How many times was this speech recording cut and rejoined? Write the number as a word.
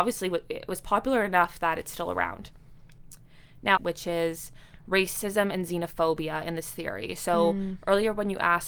one